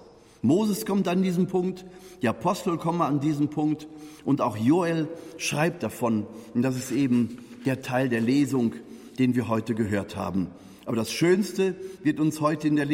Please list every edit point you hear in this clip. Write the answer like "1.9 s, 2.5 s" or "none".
none